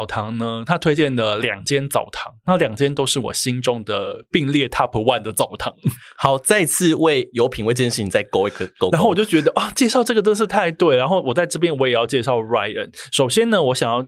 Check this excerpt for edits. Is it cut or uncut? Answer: uncut